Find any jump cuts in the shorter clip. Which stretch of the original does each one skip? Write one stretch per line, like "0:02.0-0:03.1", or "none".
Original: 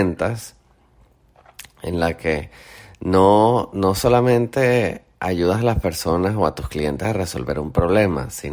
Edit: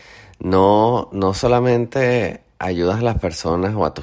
none